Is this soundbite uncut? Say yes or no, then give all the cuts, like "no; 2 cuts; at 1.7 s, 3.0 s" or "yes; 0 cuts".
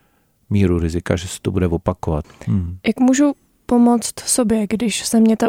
no; 1 cut; at 2.2 s